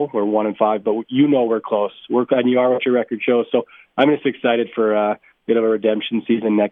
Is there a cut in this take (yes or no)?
no